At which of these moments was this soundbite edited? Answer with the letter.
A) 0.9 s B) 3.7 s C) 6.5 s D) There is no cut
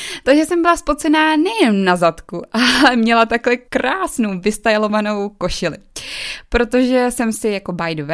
B